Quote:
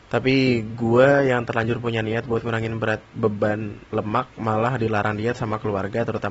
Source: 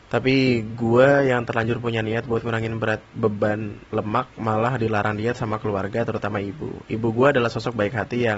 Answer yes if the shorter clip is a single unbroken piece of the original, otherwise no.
yes